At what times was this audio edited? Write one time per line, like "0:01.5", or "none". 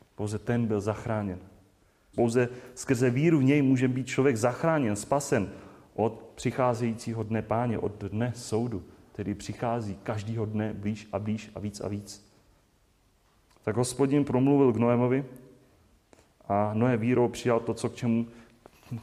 0:02.1